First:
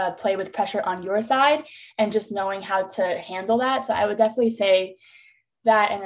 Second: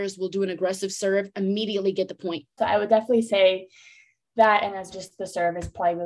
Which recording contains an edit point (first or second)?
second